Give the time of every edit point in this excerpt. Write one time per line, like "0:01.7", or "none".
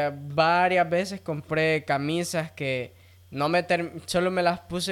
none

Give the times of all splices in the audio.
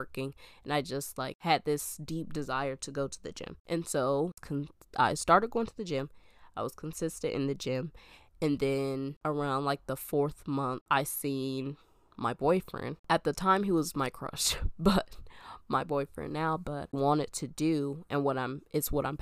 0:16.9

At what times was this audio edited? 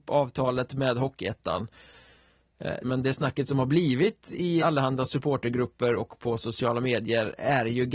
0:02.8
0:04.6

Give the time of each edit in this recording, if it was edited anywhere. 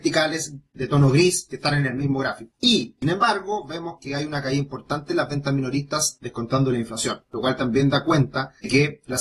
none

